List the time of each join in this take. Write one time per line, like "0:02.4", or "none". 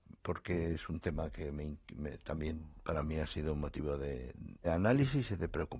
0:04.6